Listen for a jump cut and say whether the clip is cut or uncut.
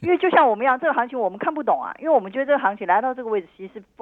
uncut